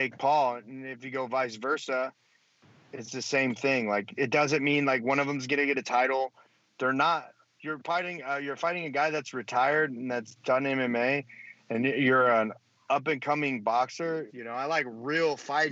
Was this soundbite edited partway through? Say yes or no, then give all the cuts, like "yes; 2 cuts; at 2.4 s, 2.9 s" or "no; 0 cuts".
yes; 1 cut; at 14.3 s